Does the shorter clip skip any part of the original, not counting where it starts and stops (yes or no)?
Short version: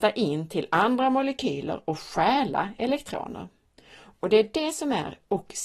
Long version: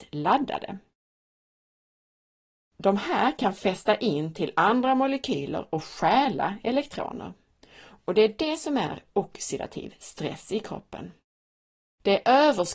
no